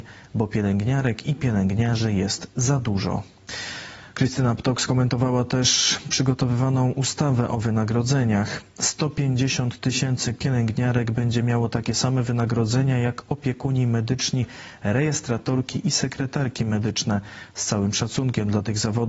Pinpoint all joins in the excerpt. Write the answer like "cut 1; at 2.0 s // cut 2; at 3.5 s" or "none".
none